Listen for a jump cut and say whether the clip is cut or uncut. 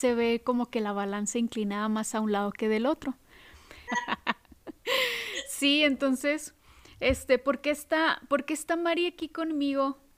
cut